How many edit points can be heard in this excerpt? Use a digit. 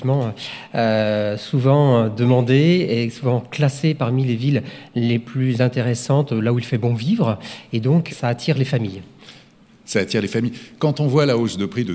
1